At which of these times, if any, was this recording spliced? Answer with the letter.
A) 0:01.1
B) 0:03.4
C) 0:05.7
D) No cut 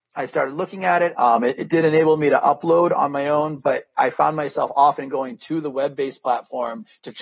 A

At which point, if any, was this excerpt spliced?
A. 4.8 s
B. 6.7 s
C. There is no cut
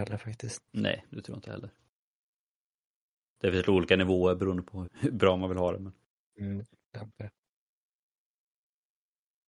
A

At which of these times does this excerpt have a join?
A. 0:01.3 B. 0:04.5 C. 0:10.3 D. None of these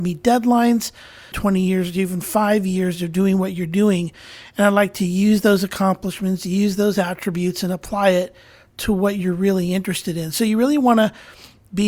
A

